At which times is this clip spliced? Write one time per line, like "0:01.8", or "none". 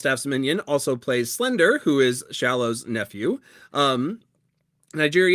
none